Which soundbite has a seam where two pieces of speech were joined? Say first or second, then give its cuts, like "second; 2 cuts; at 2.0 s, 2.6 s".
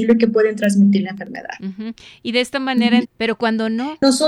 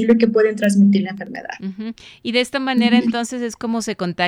first; 1 cut; at 3.0 s